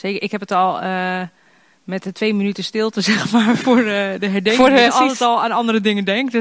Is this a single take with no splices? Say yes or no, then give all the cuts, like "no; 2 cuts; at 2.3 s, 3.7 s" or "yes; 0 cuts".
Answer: no; 1 cut; at 4.8 s